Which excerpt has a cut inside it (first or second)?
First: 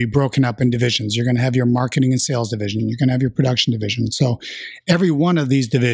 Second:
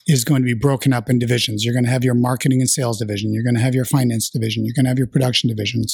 first